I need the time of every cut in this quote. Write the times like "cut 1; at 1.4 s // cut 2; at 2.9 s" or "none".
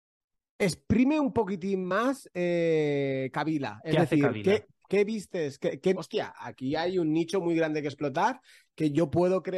cut 1; at 4.9 s // cut 2; at 5.9 s